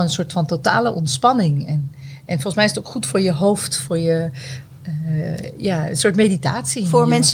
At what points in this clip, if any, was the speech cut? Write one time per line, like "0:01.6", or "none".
none